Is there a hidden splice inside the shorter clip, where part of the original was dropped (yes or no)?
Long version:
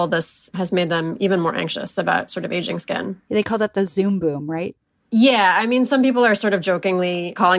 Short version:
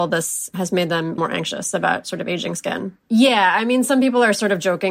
yes